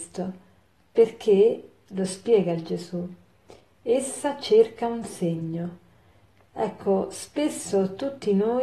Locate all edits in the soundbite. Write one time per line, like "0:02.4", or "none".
none